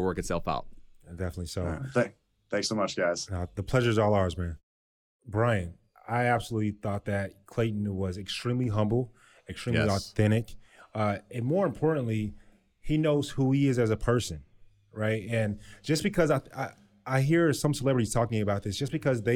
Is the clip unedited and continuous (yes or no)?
yes